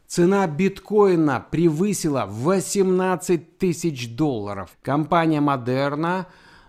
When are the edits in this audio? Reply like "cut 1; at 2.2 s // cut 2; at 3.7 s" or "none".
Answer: cut 1; at 4.7 s